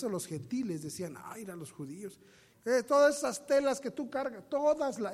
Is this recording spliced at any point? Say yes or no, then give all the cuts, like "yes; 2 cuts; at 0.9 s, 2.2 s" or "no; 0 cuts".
yes; 1 cut; at 2.5 s